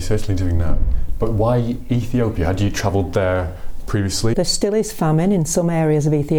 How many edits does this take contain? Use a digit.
1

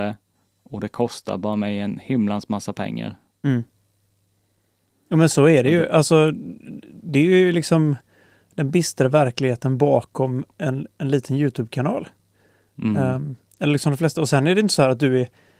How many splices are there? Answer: 0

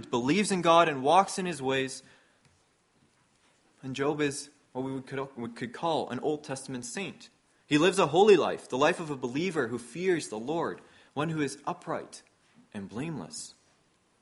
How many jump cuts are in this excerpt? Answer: 0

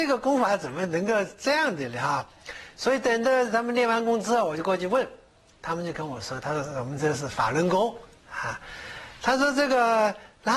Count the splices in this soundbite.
0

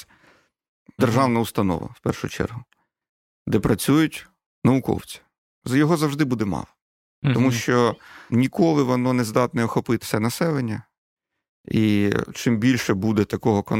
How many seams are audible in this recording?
3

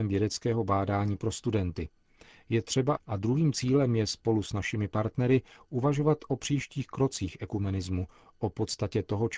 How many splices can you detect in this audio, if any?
1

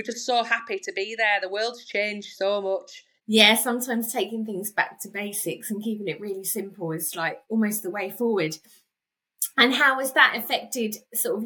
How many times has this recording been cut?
1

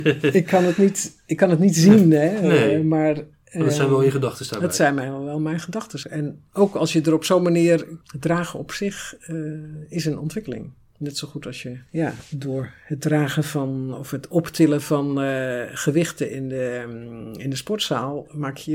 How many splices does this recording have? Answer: 2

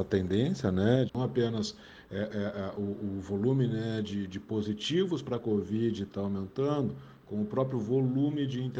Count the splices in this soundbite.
1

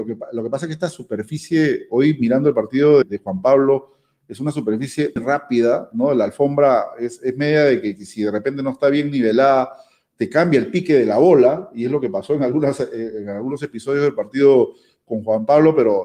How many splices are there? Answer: 2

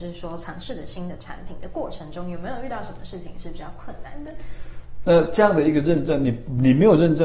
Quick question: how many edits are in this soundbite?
1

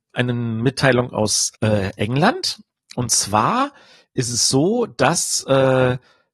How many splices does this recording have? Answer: 1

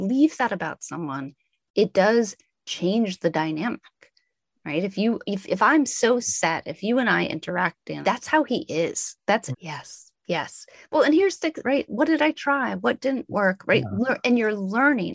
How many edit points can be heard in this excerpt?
3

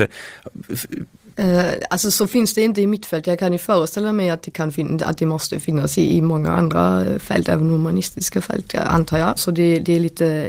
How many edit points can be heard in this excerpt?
1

